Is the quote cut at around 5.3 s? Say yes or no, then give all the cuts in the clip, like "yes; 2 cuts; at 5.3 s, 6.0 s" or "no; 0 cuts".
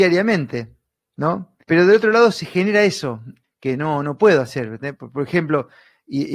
no; 2 cuts; at 1.6 s, 3.4 s